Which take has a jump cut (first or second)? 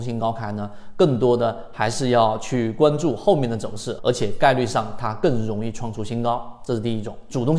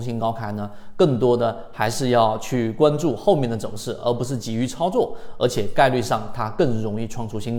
first